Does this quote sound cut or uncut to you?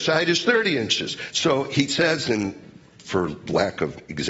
cut